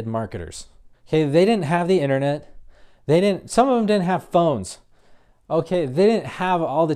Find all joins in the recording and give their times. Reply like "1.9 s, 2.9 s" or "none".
0.9 s